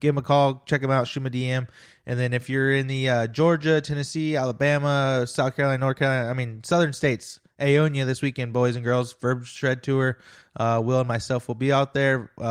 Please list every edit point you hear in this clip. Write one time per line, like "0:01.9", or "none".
none